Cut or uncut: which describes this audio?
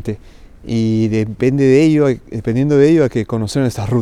uncut